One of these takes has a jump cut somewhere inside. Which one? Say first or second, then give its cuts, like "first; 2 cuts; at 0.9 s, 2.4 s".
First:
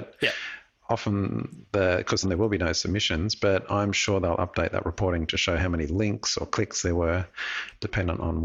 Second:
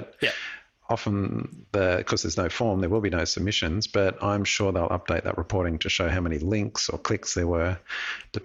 first; 1 cut; at 2.2 s